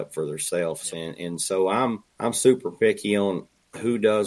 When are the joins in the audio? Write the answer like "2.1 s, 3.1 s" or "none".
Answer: 0.9 s, 2.1 s